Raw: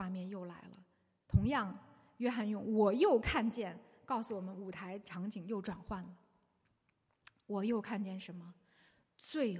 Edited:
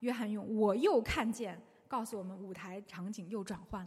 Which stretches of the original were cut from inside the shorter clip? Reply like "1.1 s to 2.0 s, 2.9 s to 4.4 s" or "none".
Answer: none